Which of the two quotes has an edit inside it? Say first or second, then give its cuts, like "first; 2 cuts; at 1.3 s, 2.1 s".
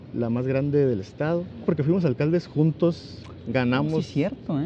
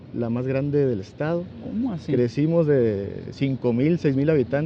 first; 1 cut; at 1.6 s